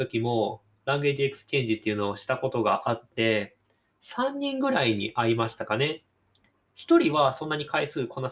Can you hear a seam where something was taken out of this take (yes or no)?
no